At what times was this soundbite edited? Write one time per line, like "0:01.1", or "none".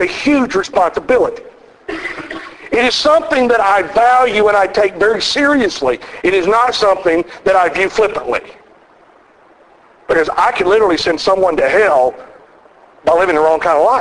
none